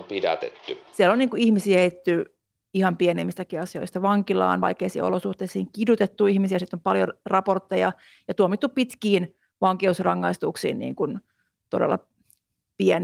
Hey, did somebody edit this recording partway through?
no; 0 cuts

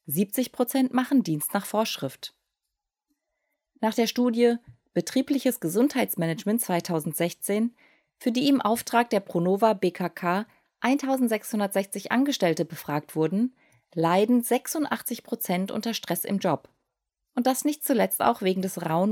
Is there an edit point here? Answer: no; 0 cuts

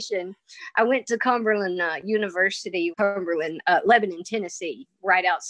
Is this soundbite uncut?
no; 1 cut; at 2.9 s

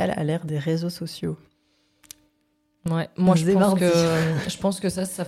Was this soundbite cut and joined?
no; 0 cuts

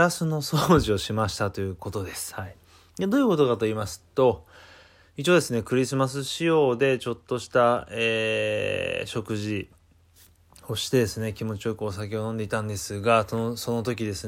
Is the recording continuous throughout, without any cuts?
yes; 0 cuts

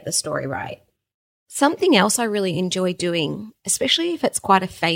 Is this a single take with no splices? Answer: yes; 0 cuts

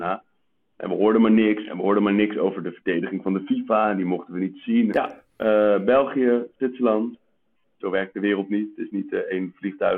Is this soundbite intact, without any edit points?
no; 2 cuts; at 4.9 s, 7.8 s

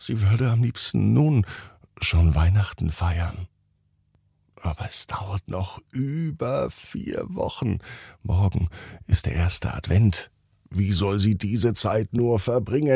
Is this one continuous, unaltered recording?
yes; 0 cuts

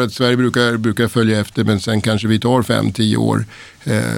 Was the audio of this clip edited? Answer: no; 0 cuts

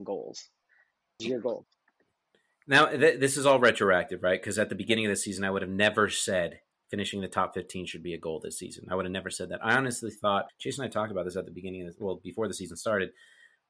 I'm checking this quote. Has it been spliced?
yes; 2 cuts; at 1.2 s, 10.5 s

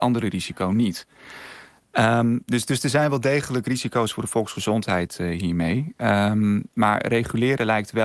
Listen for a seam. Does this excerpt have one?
no; 0 cuts

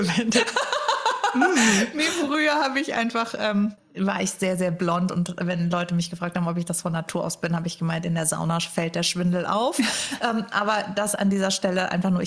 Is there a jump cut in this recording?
no; 0 cuts

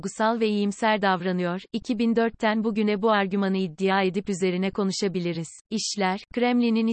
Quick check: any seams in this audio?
yes; 1 cut; at 5.6 s

